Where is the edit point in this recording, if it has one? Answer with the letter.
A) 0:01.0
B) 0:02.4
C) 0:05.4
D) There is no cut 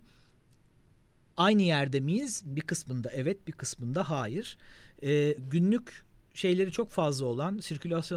C